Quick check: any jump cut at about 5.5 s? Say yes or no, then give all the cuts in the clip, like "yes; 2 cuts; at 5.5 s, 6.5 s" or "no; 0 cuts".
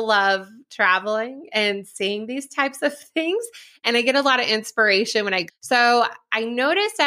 yes; 1 cut; at 5.5 s